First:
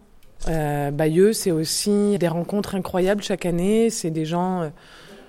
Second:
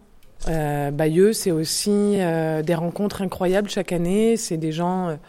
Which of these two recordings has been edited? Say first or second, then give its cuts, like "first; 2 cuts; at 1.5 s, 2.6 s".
first; 1 cut; at 2.2 s